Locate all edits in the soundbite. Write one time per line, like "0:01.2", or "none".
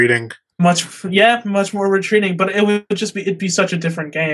none